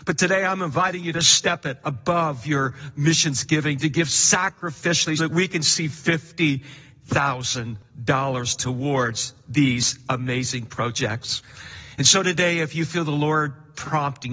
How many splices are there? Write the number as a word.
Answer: one